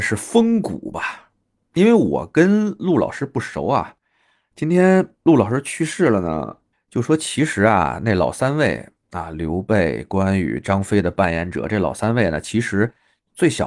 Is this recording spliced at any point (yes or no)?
yes